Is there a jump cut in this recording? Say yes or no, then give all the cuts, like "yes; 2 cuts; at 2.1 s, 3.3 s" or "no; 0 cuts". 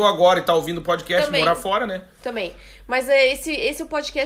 no; 0 cuts